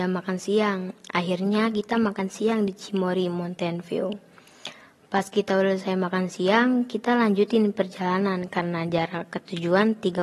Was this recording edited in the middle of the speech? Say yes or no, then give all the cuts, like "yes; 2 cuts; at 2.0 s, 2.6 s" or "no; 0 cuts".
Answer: no; 0 cuts